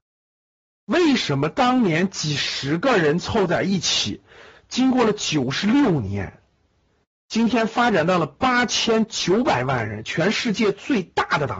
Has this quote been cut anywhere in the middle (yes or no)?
no